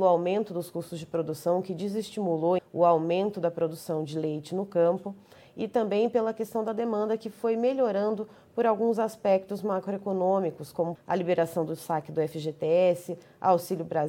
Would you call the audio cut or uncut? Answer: cut